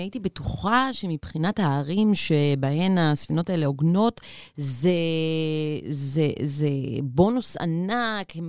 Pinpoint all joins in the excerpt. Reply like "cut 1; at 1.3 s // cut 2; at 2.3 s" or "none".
none